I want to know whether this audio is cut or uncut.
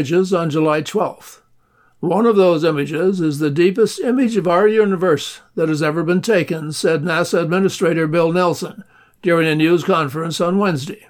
uncut